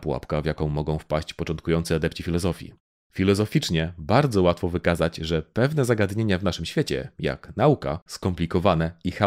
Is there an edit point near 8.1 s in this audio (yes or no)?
yes